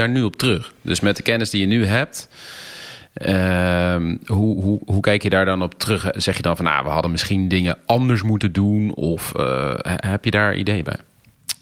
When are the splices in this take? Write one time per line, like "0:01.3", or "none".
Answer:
none